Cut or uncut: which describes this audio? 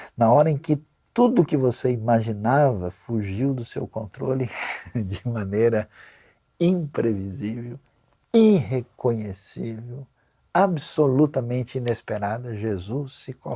uncut